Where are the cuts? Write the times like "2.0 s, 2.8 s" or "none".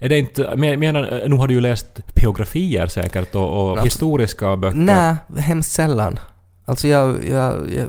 3.7 s